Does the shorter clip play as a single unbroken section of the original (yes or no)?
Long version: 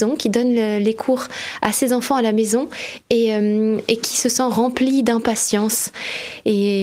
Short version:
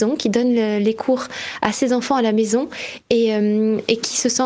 yes